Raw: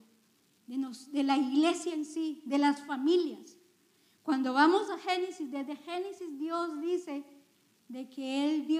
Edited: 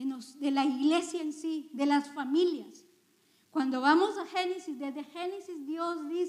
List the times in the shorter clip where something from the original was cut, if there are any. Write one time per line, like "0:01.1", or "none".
none

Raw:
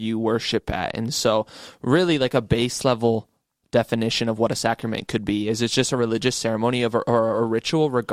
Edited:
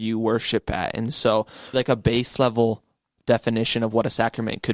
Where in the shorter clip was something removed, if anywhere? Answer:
0:01.7

